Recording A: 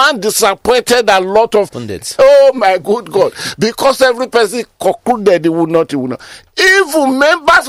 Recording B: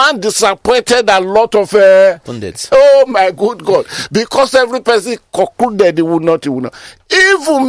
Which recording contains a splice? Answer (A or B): A